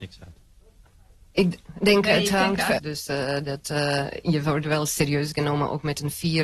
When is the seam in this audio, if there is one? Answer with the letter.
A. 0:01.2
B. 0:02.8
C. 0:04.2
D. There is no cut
B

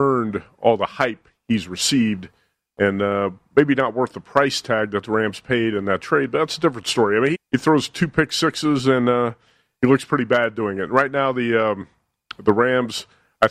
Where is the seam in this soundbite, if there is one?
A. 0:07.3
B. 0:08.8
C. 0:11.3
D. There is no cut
A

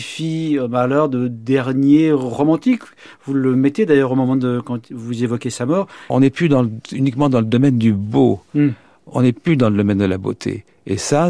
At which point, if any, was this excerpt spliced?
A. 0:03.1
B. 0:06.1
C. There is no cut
B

